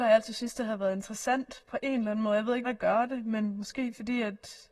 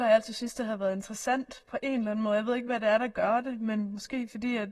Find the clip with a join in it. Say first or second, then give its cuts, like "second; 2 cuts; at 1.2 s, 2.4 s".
first; 1 cut; at 2.6 s